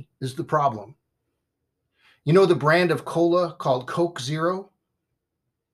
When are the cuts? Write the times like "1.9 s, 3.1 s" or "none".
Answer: none